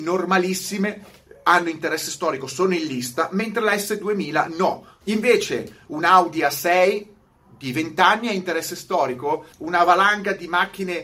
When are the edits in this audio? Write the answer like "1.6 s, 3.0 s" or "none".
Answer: 5.0 s, 9.5 s